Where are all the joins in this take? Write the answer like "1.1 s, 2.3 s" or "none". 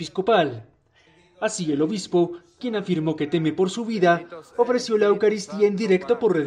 none